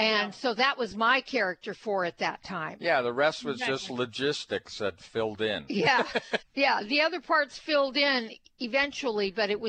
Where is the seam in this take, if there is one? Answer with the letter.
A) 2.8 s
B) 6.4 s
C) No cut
B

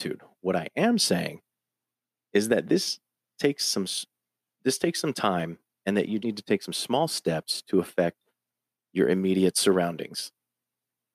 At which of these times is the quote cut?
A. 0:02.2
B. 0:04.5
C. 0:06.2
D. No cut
C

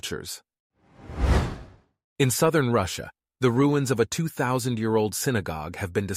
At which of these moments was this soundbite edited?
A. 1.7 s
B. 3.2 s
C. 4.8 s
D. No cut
D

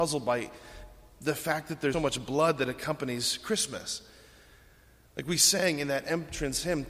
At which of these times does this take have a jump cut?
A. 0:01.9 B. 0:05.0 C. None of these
A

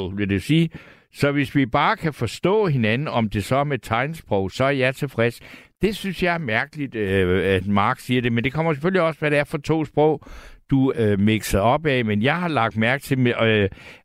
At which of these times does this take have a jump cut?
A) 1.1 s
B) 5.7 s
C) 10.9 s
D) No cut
C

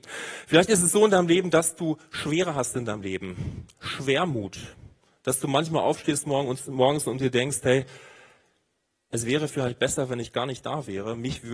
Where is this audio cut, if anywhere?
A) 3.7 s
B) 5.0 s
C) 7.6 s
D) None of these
D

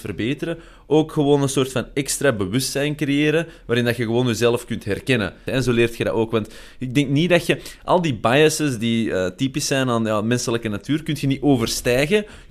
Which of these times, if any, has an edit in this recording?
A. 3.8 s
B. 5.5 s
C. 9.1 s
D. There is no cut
B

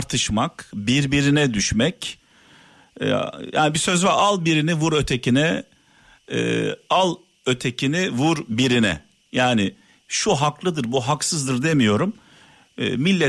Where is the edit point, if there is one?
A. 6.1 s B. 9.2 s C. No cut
C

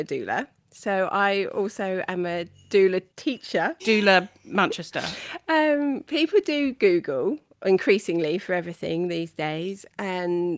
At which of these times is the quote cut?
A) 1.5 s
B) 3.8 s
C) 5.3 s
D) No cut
B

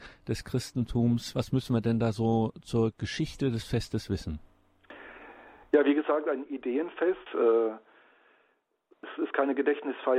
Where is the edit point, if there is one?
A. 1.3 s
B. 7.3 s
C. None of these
B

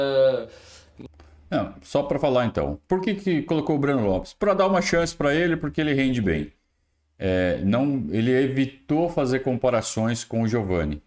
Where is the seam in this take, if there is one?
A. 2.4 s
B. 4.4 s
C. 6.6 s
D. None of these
D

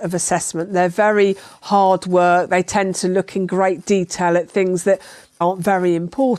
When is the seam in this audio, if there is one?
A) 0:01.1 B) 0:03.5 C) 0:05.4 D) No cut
C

